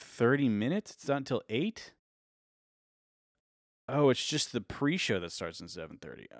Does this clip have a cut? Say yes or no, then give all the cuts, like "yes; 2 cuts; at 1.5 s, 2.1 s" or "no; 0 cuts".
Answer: no; 0 cuts